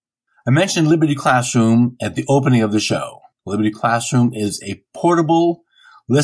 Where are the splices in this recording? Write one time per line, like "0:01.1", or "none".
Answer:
0:03.3